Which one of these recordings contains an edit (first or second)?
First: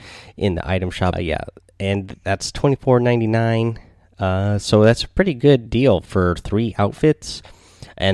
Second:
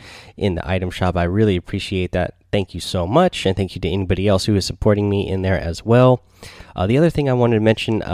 first